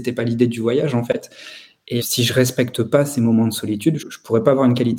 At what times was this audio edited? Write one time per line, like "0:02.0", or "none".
0:02.0
0:04.0